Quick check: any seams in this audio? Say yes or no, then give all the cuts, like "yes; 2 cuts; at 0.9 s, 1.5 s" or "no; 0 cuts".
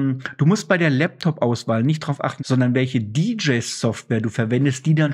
yes; 1 cut; at 2.4 s